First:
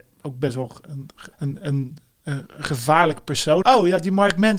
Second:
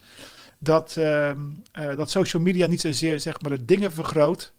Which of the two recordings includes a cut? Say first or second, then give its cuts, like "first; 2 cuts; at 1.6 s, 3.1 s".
first; 2 cuts; at 1.3 s, 3.6 s